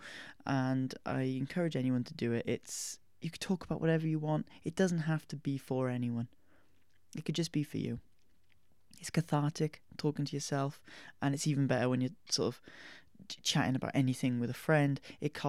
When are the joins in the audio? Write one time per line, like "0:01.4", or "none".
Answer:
none